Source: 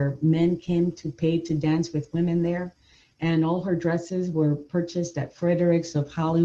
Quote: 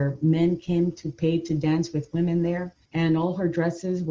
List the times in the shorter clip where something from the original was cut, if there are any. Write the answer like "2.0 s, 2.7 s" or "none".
2.8 s